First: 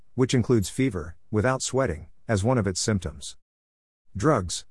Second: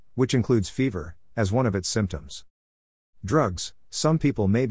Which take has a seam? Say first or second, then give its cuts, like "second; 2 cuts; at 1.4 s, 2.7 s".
second; 1 cut; at 1.3 s